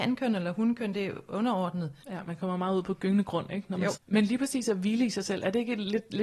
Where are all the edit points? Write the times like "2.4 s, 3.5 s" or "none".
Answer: 2.0 s, 3.9 s